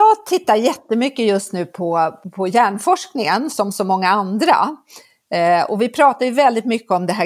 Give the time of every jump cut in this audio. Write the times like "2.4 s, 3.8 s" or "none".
2.2 s